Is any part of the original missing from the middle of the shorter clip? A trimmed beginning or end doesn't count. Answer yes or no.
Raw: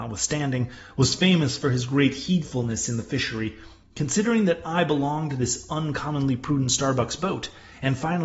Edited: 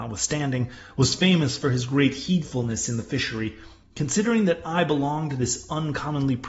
no